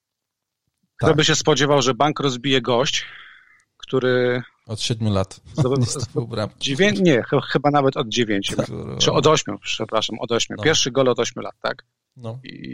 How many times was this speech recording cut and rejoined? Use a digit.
1